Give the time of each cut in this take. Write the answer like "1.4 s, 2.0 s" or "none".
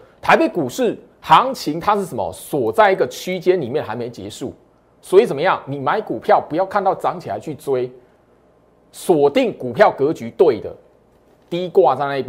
none